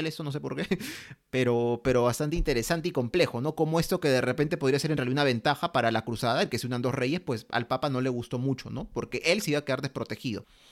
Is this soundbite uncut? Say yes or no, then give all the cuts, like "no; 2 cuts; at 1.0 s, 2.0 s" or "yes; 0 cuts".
yes; 0 cuts